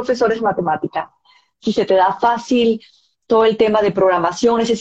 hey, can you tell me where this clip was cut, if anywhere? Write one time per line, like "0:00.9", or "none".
none